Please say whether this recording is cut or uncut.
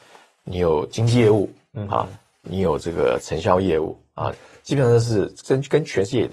cut